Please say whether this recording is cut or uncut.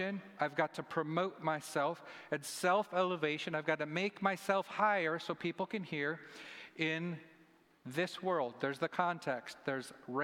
uncut